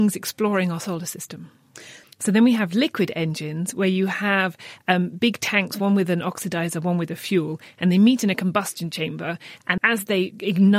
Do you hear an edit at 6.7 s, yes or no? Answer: no